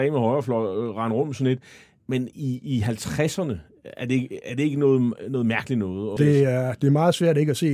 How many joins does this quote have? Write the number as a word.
one